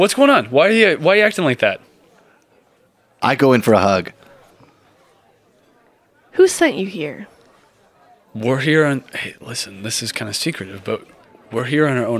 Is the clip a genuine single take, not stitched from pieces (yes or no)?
yes